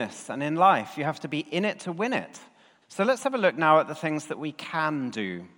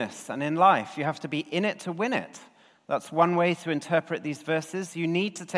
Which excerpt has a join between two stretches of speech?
first; 1 cut; at 2.8 s

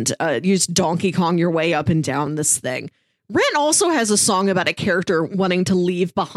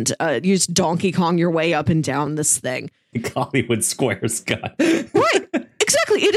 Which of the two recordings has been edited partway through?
second; 1 cut; at 3.1 s

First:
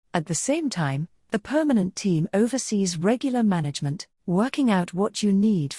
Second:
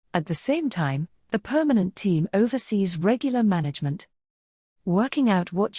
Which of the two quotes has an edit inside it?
first; 1 cut; at 4.2 s

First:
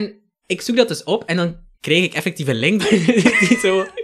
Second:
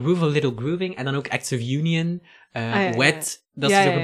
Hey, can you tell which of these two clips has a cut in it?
first; 2 cuts; at 1.7 s, 2.8 s

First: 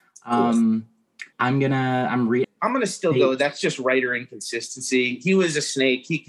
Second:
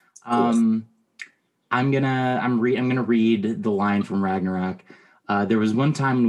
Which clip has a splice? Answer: first; 2 cuts; at 1.3 s, 2.4 s

